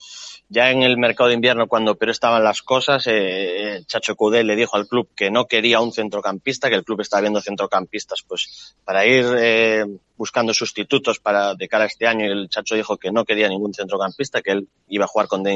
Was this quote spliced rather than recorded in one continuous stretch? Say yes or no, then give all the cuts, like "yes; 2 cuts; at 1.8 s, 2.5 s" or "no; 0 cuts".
no; 0 cuts